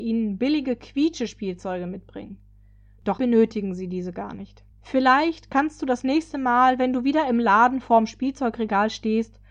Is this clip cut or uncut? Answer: cut